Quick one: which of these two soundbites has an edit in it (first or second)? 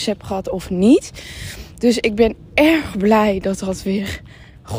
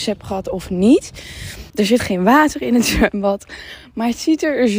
second